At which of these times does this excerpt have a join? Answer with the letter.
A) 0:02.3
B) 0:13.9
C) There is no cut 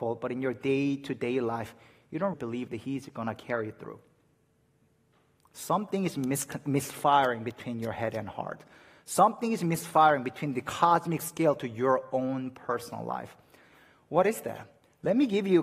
A